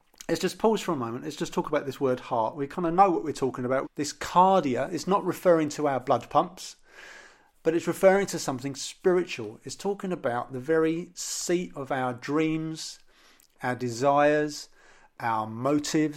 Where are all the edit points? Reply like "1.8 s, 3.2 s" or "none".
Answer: 3.8 s

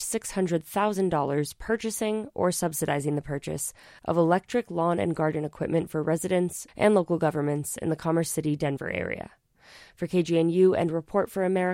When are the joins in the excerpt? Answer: 6.7 s

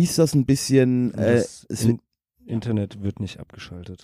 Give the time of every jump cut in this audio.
none

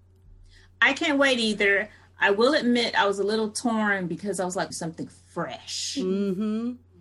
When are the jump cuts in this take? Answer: 4.7 s

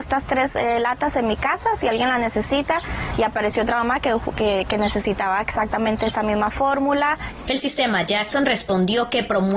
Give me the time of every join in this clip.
7.5 s

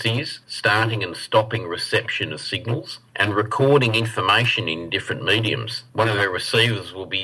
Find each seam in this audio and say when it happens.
5.9 s

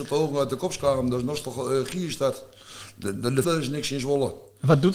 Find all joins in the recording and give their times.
3.4 s

